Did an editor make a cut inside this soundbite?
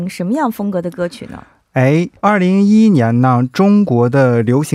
yes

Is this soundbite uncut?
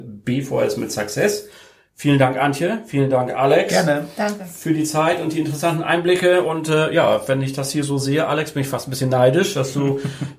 yes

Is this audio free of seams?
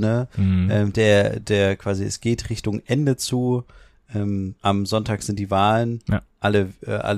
yes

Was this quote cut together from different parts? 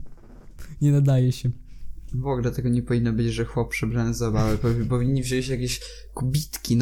no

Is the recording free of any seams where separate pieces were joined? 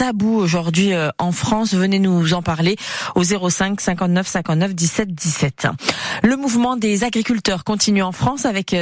yes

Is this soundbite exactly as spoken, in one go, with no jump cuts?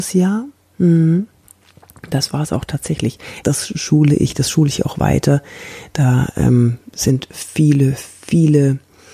no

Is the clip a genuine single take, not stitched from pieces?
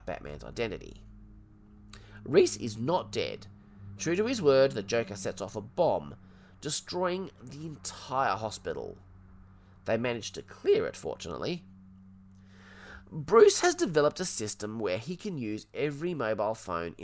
no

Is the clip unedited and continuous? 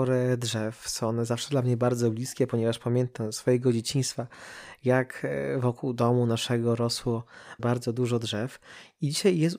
no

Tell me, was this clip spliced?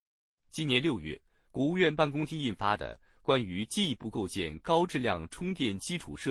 no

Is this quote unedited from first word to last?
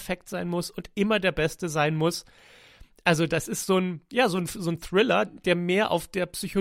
no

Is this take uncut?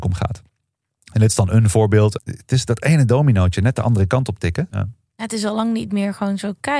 no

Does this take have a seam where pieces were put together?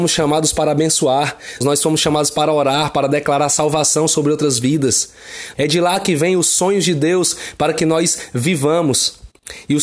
yes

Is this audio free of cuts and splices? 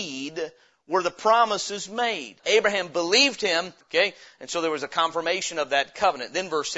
no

